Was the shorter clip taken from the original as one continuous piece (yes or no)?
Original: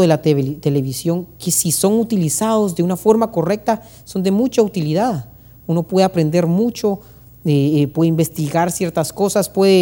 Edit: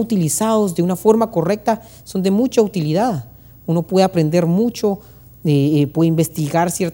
yes